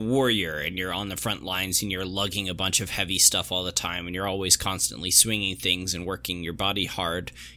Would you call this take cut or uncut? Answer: uncut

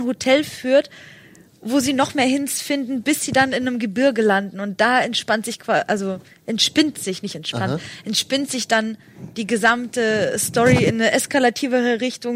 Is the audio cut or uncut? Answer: uncut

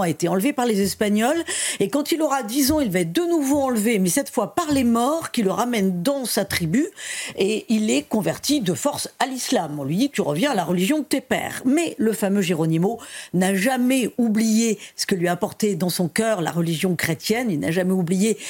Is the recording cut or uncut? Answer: uncut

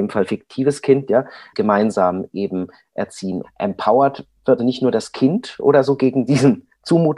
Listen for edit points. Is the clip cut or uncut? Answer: cut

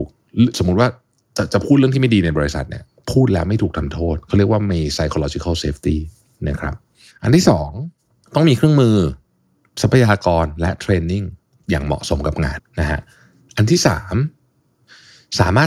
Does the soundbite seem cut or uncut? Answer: cut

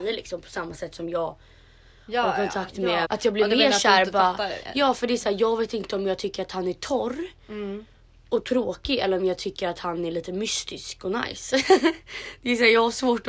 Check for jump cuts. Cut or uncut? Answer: cut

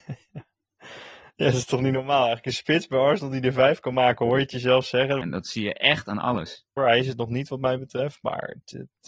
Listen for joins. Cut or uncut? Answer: cut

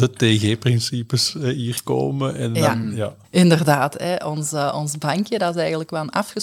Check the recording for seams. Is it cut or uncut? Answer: cut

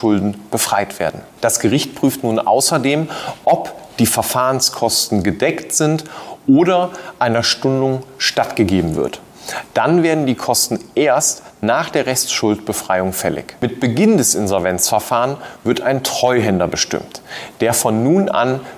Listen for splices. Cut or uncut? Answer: uncut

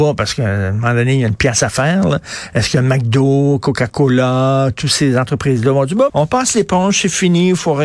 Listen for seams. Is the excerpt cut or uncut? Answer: cut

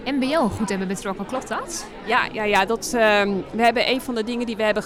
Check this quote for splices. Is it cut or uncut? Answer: uncut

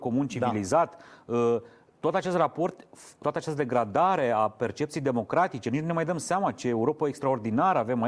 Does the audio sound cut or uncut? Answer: cut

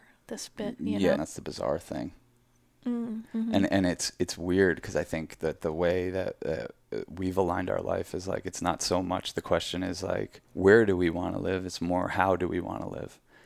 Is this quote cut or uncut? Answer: cut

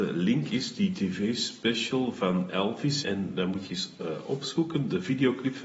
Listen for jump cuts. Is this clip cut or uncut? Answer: cut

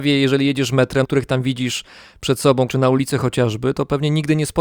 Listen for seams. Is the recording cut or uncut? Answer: cut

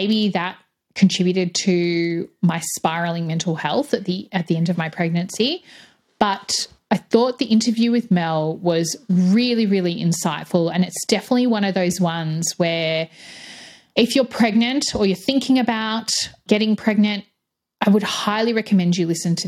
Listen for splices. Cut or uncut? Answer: uncut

